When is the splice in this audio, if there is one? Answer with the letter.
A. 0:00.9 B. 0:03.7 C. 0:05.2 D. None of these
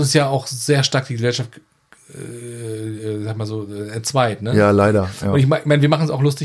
D